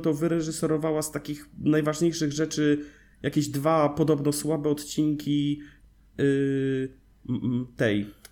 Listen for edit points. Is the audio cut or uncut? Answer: uncut